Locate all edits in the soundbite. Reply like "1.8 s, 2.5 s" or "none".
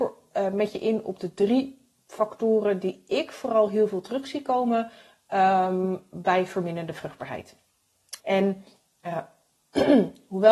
8.2 s